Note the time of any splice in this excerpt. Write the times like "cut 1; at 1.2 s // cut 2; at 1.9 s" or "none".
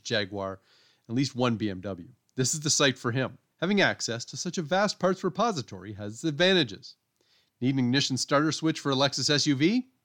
cut 1; at 3.5 s